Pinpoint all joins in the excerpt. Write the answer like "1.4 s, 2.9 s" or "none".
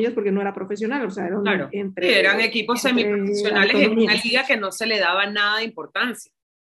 1.7 s